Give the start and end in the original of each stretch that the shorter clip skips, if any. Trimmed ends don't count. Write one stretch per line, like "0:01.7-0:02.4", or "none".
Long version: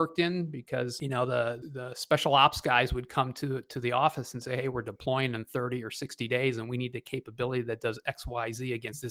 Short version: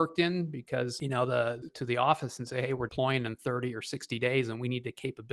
0:01.7-0:03.6
0:04.8-0:05.0